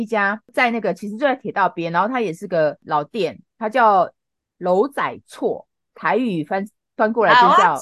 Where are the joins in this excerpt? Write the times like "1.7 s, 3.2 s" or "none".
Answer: none